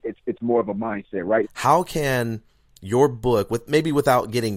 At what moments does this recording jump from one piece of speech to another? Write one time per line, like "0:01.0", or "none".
0:01.4